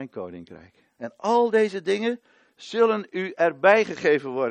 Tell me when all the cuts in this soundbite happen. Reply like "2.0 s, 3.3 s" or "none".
1.0 s